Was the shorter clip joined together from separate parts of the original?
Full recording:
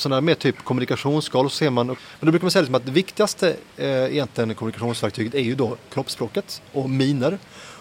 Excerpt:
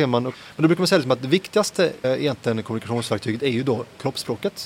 yes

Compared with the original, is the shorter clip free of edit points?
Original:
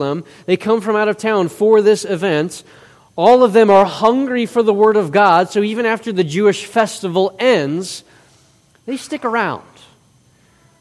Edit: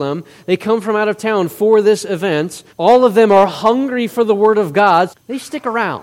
no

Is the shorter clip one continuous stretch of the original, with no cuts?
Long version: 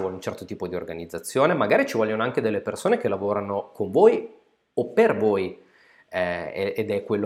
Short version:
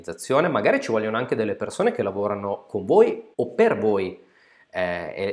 no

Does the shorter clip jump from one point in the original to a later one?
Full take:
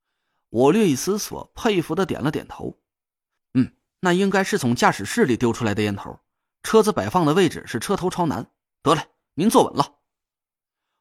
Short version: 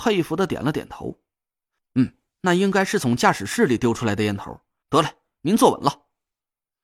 yes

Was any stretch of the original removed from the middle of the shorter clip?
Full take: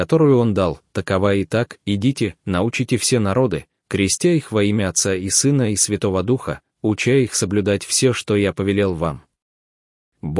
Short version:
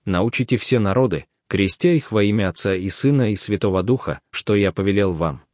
yes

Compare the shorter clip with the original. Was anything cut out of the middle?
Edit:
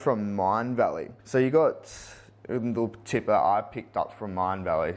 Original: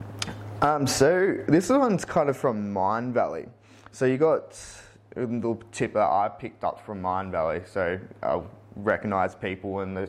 yes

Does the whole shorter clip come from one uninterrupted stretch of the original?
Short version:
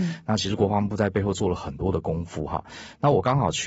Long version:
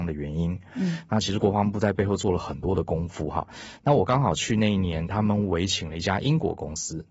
yes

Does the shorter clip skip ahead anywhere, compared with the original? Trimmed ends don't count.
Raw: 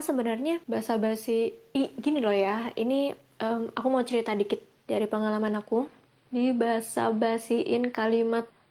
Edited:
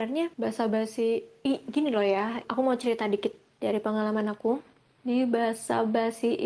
yes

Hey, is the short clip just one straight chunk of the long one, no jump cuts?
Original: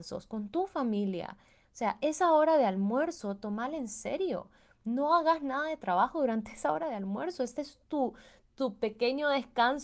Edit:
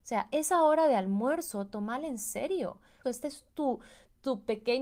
no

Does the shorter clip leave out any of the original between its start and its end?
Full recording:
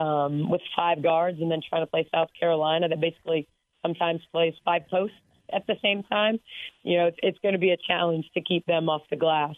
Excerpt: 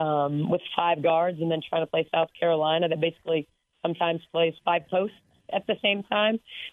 no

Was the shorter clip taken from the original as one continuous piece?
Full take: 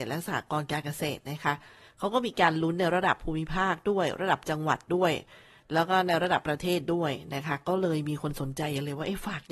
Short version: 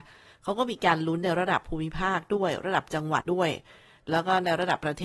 no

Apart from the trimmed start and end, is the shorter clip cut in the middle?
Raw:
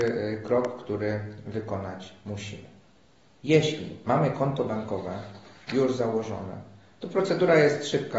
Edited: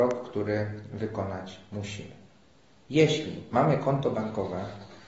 no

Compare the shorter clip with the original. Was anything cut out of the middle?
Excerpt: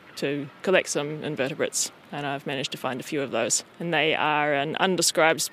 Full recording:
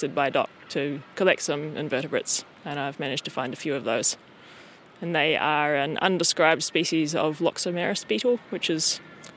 yes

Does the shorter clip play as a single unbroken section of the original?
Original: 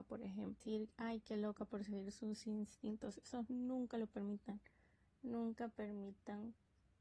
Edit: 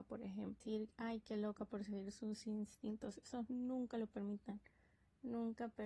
yes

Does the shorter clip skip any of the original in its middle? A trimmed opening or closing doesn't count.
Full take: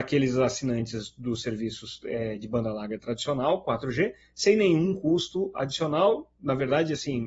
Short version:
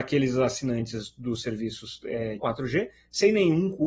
yes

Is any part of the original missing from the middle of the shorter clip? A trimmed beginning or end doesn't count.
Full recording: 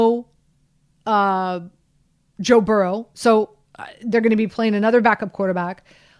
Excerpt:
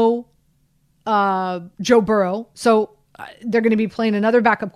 yes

